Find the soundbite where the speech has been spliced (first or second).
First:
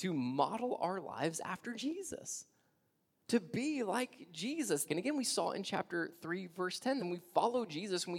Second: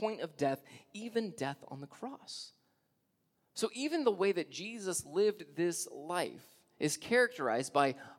first